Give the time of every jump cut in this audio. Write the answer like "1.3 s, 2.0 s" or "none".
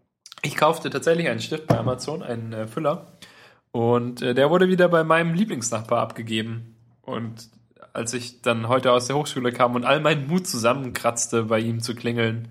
none